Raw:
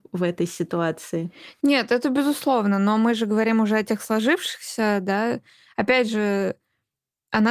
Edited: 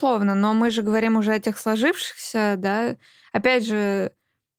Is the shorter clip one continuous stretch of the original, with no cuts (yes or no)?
yes